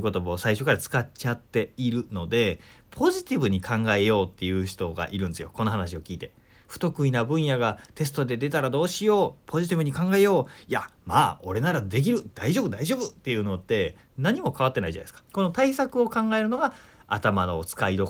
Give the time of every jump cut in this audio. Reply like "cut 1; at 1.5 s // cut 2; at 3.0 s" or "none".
cut 1; at 6.6 s // cut 2; at 15.3 s